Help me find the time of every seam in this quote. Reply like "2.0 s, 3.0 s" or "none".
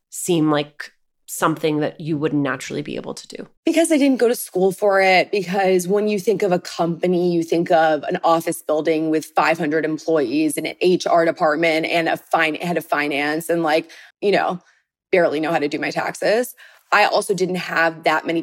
3.6 s, 14.1 s